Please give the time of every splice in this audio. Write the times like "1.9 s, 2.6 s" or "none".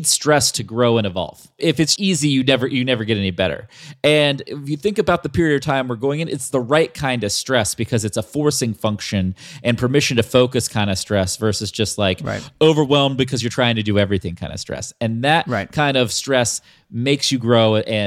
2.0 s

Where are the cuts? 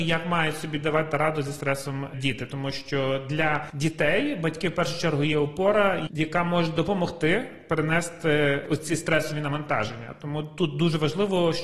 6.1 s

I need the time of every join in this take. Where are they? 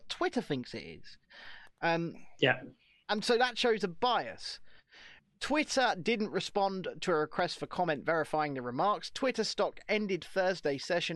none

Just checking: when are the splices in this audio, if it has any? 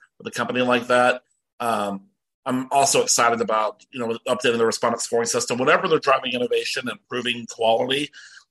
none

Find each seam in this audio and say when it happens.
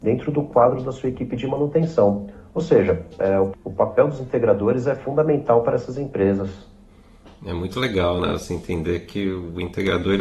none

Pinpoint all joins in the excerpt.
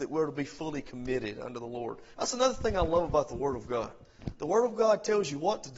2.2 s

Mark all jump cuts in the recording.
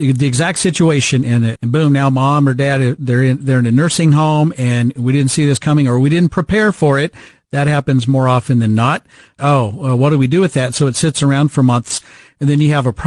1.6 s, 9.4 s

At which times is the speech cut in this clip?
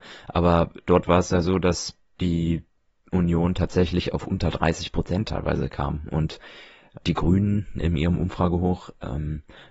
none

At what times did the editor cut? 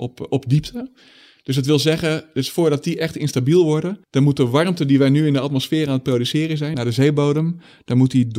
4.0 s, 6.7 s

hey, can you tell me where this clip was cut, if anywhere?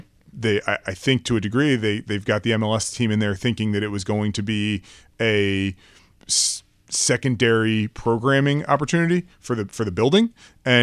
none

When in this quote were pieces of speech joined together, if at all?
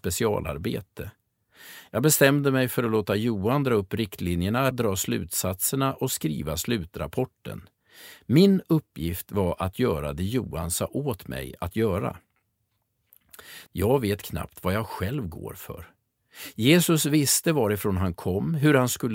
4.7 s, 13.7 s

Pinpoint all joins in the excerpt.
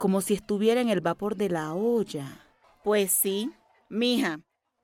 2.6 s

